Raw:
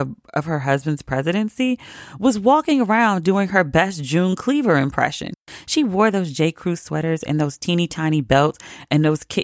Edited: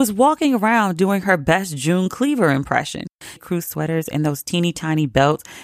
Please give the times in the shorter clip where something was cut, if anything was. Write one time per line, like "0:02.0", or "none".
0:03.4